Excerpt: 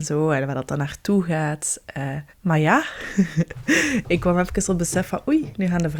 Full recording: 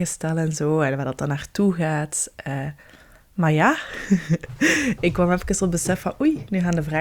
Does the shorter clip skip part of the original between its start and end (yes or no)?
yes